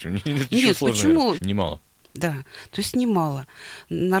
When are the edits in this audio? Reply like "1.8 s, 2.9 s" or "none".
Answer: 1.4 s